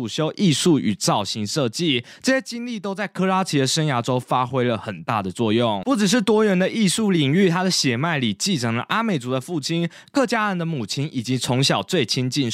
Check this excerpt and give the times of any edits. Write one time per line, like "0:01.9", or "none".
none